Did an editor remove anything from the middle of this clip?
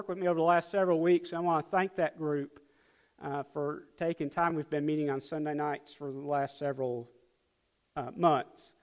no; 0 cuts

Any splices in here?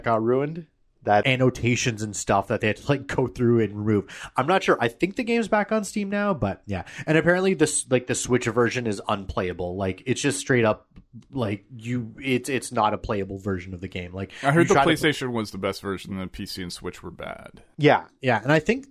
yes; 1 cut; at 1.2 s

